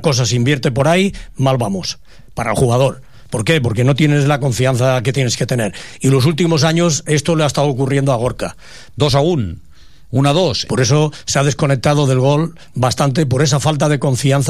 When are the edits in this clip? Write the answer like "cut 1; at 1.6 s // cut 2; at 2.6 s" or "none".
cut 1; at 8.9 s // cut 2; at 10.7 s

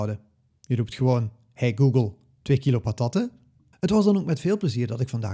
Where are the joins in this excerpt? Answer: cut 1; at 3.7 s

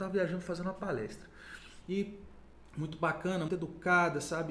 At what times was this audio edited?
cut 1; at 1.8 s // cut 2; at 3.5 s

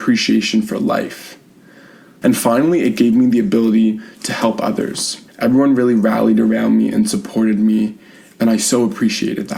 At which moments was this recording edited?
cut 1; at 2.2 s // cut 2; at 5.3 s

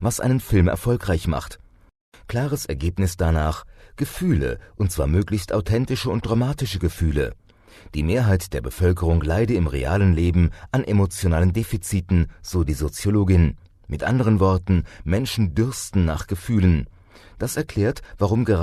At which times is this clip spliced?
none

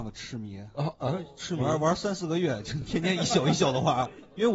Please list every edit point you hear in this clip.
none

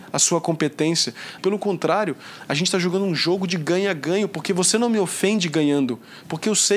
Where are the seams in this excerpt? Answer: cut 1; at 1.4 s

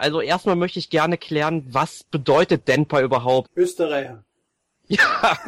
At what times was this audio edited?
cut 1; at 3.4 s

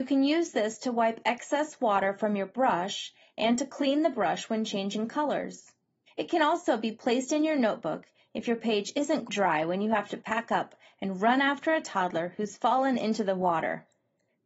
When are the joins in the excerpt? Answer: cut 1; at 6.1 s // cut 2; at 9.3 s

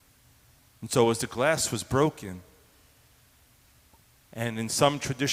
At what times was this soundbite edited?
none

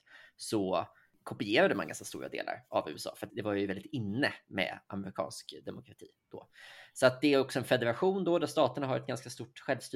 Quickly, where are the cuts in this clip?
cut 1; at 3.3 s

